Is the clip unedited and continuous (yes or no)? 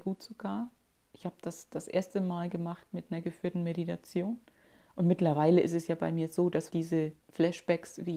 no